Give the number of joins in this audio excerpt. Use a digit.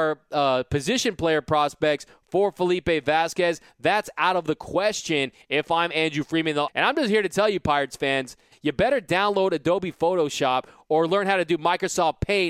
2